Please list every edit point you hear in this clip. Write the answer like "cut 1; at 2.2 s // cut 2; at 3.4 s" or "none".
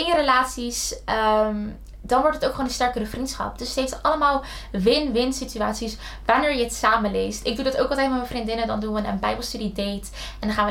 none